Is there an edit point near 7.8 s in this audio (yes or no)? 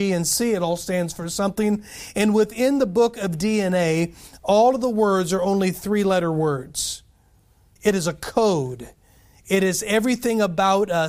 yes